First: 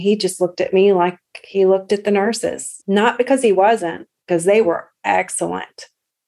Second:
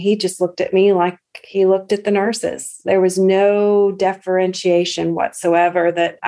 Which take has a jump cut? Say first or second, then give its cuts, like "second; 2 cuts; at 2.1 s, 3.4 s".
first; 1 cut; at 2.8 s